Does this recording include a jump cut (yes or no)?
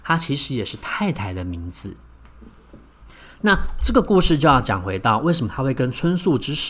no